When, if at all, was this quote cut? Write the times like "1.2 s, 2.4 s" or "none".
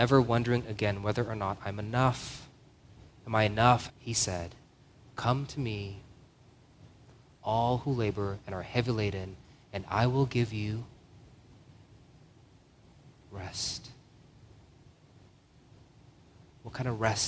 3.9 s